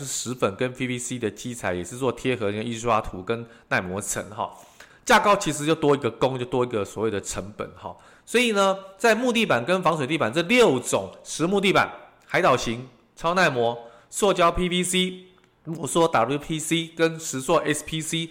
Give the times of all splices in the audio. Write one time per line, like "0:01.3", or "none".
0:04.9